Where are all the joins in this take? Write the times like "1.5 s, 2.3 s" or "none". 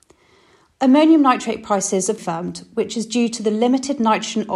2.2 s